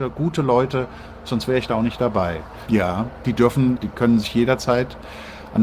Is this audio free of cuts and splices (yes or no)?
no